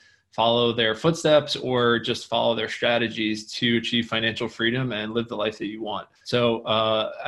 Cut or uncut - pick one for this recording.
cut